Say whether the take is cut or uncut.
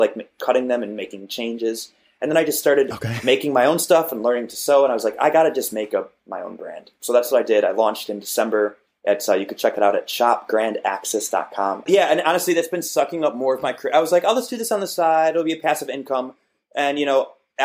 cut